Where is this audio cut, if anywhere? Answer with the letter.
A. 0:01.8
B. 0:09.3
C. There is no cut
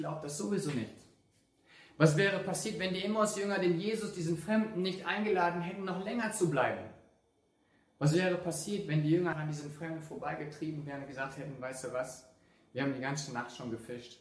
B